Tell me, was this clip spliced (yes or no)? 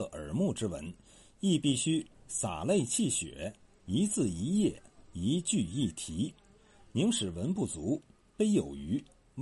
no